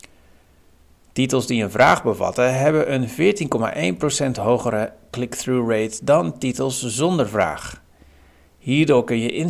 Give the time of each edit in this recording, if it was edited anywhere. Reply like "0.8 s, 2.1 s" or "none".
none